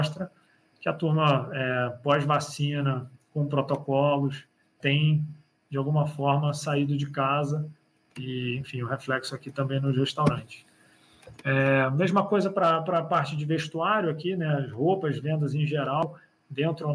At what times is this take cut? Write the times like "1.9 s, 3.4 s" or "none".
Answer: 4.8 s